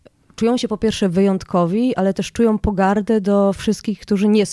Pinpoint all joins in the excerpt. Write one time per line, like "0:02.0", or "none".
none